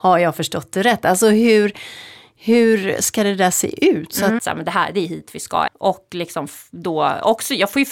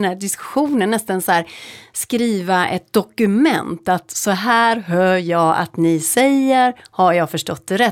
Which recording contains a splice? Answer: first; 2 cuts; at 4.4 s, 5.7 s

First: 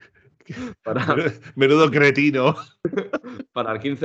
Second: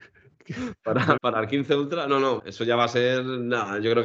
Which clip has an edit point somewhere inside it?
second; 2 cuts; at 1.2 s, 2.4 s

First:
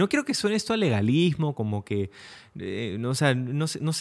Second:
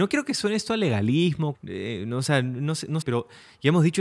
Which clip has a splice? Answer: second; 2 cuts; at 1.5 s, 3.0 s

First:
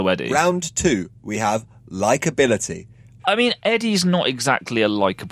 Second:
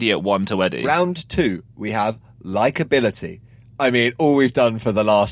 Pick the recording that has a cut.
first; 1 cut; at 3.2 s

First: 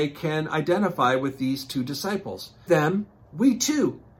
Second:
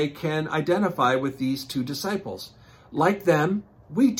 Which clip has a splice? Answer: first; 1 cut; at 2.7 s

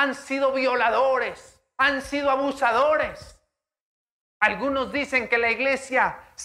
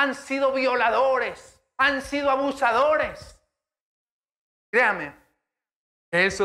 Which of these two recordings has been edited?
first; 1 cut; at 4.2 s

